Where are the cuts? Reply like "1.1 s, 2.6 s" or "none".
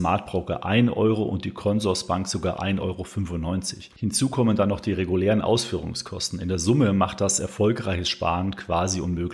3.9 s

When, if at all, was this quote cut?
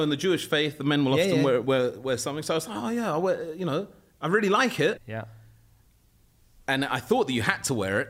5.0 s

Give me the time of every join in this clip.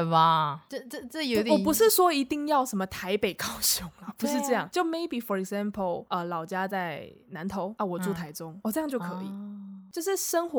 none

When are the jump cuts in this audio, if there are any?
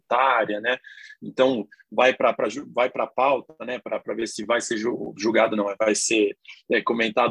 none

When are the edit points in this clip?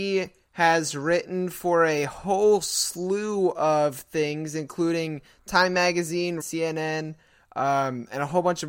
6.4 s

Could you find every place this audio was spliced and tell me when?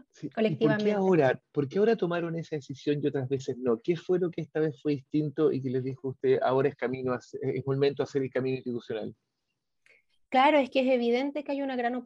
none

